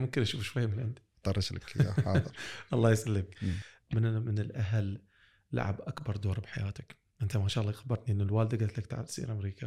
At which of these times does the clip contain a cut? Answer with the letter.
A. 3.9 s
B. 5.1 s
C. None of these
C